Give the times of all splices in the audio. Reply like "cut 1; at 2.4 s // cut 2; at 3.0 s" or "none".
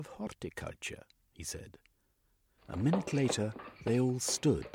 cut 1; at 2.6 s